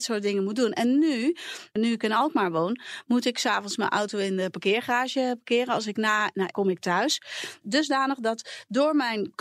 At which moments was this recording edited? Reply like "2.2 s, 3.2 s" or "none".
6.5 s, 7.6 s